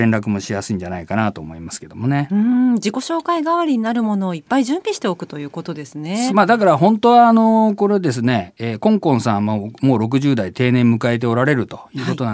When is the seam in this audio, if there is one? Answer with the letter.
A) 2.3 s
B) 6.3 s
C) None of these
B